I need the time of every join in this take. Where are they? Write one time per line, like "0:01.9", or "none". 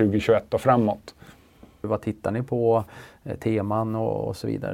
0:01.8